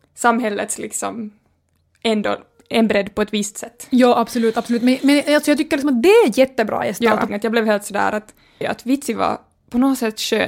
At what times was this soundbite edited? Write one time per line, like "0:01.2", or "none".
0:07.3
0:08.6